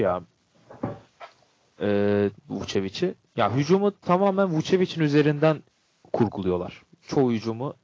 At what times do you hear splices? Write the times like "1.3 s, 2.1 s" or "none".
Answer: 2.5 s